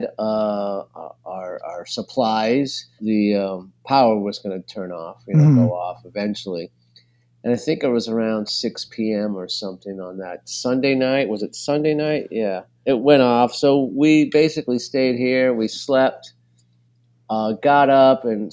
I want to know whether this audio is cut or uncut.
cut